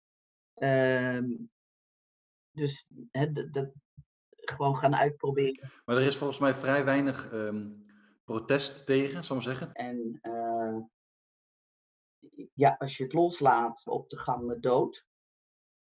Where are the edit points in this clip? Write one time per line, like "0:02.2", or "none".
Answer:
0:07.3
0:09.7
0:13.9